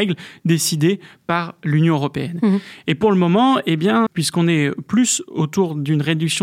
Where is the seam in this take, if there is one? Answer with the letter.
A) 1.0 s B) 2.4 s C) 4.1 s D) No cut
C